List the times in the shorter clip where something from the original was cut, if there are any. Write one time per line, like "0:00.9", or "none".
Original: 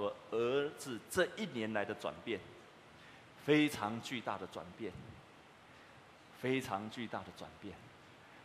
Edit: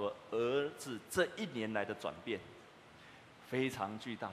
0:03.4